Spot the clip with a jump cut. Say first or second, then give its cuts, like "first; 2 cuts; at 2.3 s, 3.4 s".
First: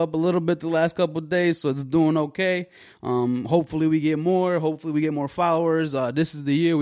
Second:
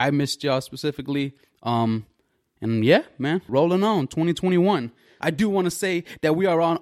second; 2 cuts; at 3.5 s, 5.2 s